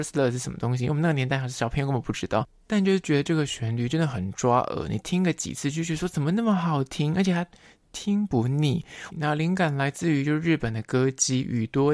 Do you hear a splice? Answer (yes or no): yes